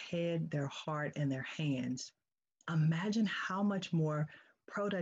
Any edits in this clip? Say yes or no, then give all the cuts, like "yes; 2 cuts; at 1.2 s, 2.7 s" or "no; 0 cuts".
yes; 1 cut; at 2.6 s